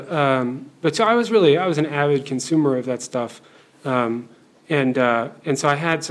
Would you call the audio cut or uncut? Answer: uncut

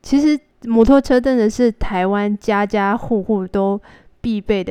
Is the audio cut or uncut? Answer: uncut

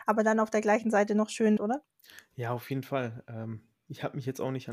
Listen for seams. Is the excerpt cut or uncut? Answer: cut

